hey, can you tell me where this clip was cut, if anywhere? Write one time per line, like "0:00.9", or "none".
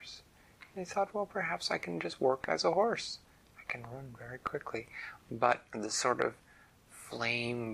0:05.7